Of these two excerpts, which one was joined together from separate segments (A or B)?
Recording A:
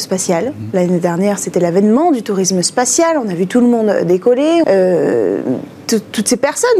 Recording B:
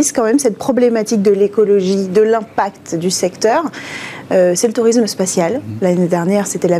A